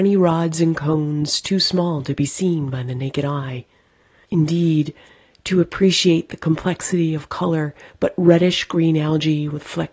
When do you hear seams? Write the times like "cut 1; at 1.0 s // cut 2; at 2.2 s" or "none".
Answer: cut 1; at 4.2 s // cut 2; at 7.9 s